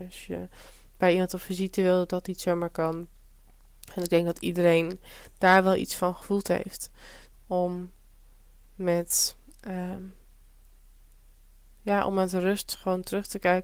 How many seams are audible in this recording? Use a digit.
1